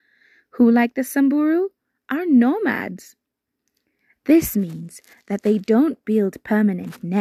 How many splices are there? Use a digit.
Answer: 0